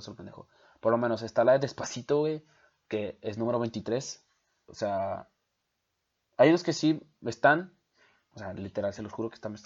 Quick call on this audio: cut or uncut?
cut